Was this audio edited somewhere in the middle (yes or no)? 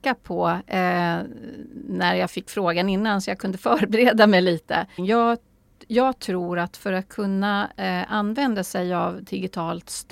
yes